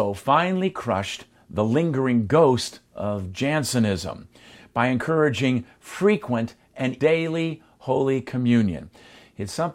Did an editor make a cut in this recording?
yes; 1 cut; at 7.0 s

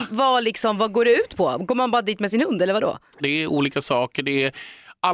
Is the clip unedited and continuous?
no; 1 cut; at 3.2 s

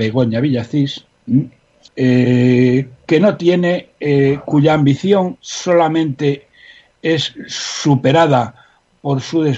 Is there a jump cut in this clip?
yes; 1 cut; at 1.9 s

